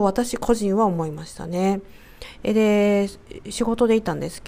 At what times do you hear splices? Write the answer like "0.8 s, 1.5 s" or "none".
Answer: 2.4 s